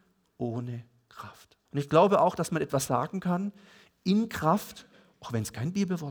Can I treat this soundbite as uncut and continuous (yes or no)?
no